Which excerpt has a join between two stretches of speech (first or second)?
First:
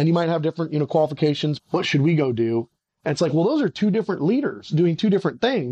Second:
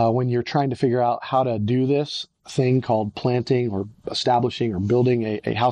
first